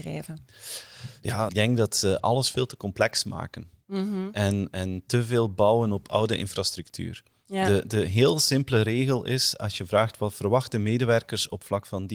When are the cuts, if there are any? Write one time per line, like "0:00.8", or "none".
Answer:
0:01.5